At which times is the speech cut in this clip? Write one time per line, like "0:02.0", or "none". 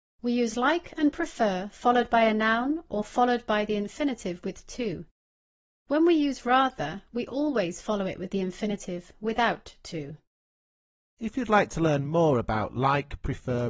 none